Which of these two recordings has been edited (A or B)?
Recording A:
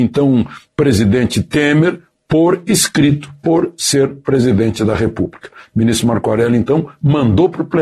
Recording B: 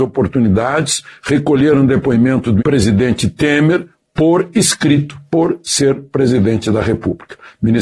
B